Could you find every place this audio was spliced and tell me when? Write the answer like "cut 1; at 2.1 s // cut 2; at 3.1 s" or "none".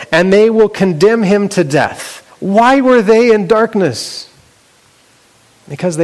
cut 1; at 2.3 s